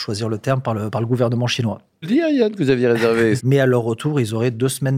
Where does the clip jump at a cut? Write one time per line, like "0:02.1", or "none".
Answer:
0:02.0
0:03.4